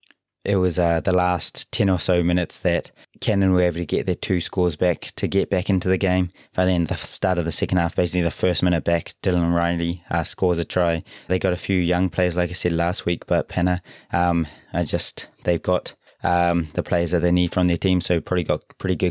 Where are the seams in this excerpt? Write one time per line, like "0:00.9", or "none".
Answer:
0:11.3